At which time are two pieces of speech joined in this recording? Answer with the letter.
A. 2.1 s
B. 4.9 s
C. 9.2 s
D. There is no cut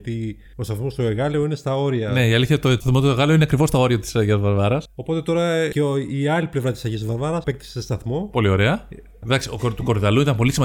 C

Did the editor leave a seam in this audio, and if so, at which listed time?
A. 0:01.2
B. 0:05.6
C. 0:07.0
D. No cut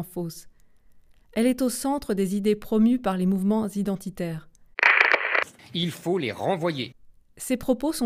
B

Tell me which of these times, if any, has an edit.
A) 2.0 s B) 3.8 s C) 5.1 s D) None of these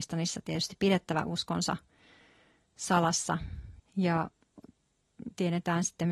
B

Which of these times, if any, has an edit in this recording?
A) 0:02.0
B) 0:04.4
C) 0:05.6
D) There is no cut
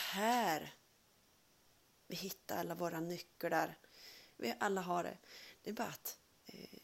B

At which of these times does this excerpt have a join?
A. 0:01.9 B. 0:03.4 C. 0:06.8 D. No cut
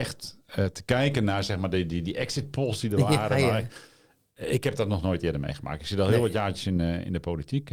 D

